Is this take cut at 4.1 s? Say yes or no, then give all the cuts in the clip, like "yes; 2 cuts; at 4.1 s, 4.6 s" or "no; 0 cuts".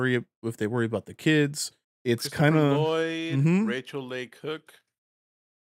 no; 1 cut; at 1.8 s